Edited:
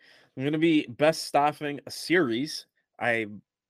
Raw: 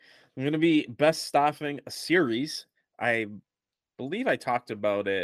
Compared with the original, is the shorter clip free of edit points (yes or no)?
yes